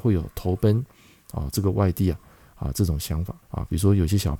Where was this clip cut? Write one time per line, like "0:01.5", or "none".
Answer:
0:03.4